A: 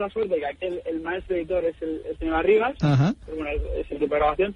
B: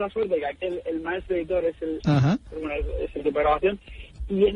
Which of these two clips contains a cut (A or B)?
B